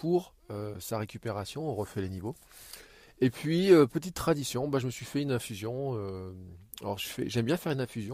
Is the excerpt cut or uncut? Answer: uncut